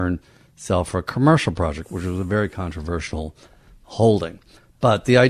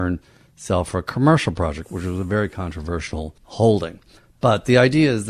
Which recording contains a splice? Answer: second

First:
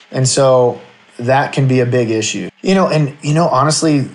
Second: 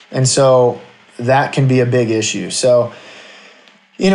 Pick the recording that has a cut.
first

